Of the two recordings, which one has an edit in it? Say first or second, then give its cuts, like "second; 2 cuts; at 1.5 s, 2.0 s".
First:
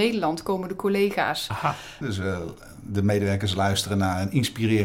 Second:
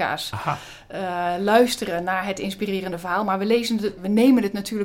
first; 1 cut; at 2.0 s